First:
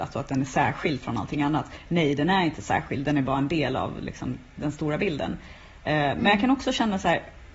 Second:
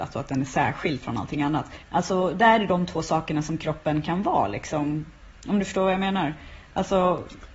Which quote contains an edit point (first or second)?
second